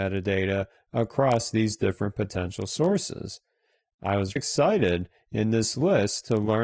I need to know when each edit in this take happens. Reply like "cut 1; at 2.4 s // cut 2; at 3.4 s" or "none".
cut 1; at 4.4 s